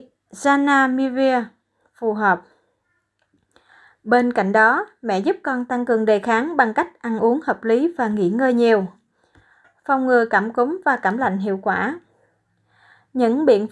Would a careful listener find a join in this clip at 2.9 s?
no; 0 cuts

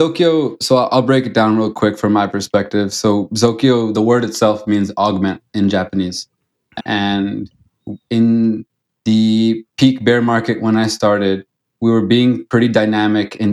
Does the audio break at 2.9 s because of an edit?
no; 1 cut; at 6.8 s

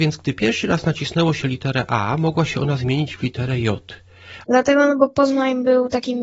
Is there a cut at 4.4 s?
yes; 1 cut; at 4.4 s

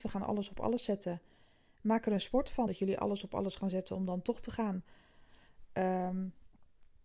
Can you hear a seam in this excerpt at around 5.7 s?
no; 1 cut; at 2.7 s

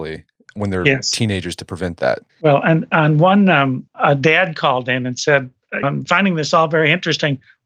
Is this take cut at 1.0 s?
no; 3 cuts; at 2.3 s, 3.9 s, 5.8 s

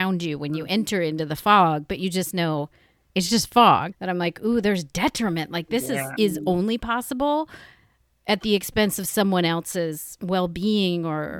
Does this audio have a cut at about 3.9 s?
yes; 2 cuts; at 3.9 s, 6.2 s

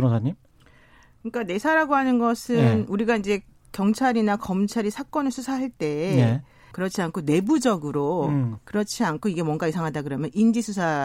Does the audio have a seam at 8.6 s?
yes; 2 cuts; at 6.7 s, 8.6 s

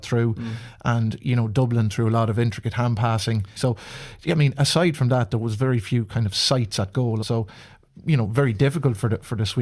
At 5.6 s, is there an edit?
no; 2 cuts; at 3.6 s, 7.2 s

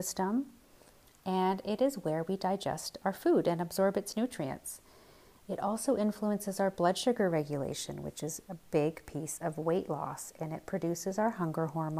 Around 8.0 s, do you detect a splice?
no; 0 cuts

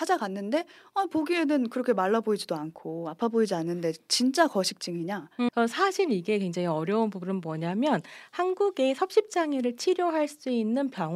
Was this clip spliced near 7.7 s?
no; 1 cut; at 5.5 s

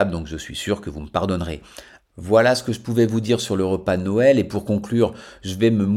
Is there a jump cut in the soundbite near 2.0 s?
yes; 1 cut; at 2.0 s

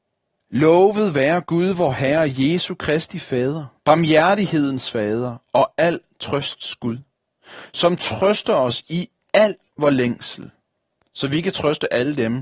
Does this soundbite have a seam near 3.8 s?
yes; 1 cut; at 3.8 s

